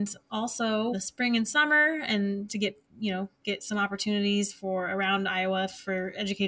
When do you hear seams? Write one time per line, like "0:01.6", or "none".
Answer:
0:00.9
0:02.5